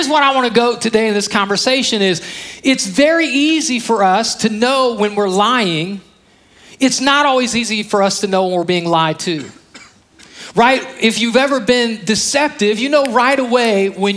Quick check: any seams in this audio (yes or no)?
no